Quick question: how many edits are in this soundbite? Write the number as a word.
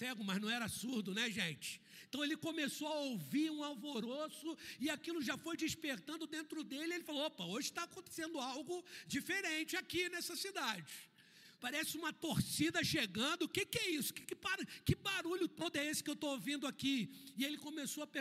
one